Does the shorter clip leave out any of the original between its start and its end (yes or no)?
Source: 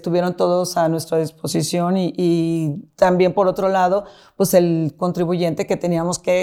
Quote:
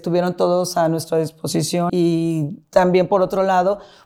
yes